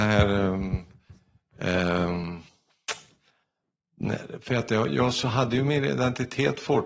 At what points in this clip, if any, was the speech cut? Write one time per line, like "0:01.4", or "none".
none